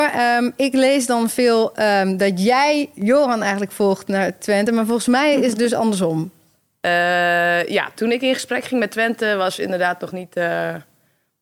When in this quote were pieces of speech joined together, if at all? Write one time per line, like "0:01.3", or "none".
none